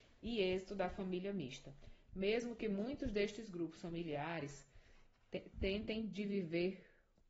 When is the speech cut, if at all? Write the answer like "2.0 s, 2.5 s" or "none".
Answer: none